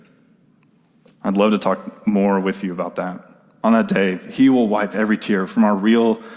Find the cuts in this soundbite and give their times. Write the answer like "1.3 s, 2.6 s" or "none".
3.6 s